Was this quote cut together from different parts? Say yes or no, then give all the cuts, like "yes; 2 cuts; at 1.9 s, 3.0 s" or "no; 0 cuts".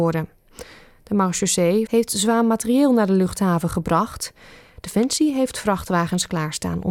yes; 1 cut; at 1.9 s